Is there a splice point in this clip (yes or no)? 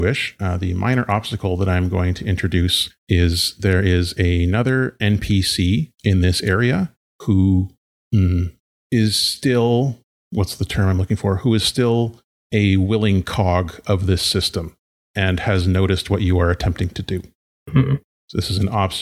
no